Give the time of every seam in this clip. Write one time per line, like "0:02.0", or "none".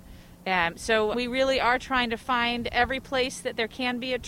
0:01.1